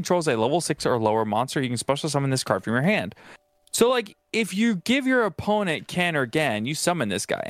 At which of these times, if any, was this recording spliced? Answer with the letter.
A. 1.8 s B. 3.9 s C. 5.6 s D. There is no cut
D